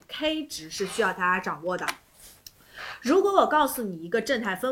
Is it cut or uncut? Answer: uncut